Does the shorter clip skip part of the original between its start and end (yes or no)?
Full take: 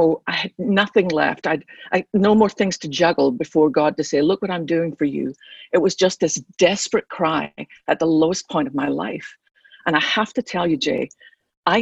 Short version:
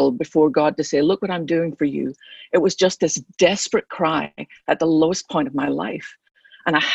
no